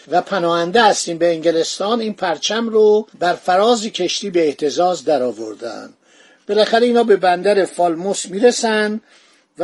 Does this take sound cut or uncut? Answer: cut